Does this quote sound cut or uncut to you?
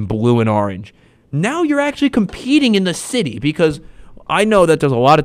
uncut